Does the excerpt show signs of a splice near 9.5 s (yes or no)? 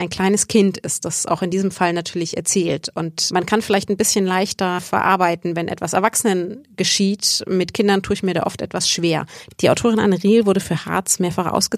yes